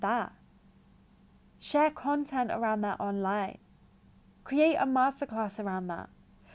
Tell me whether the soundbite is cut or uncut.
uncut